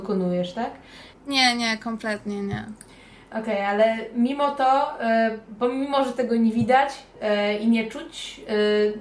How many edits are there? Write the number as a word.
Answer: one